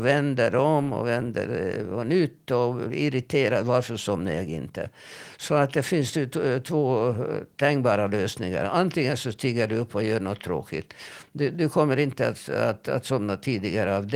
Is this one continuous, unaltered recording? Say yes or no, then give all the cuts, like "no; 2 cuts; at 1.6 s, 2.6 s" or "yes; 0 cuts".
yes; 0 cuts